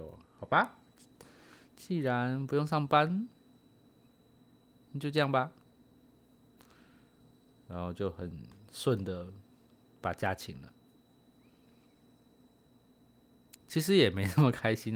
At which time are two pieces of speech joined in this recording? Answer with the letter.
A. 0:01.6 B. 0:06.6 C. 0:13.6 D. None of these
C